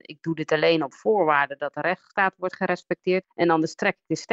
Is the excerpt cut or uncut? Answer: cut